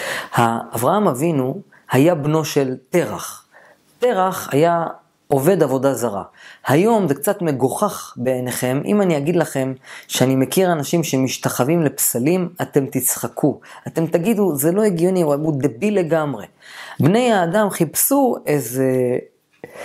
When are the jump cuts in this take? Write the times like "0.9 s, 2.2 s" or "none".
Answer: 17.0 s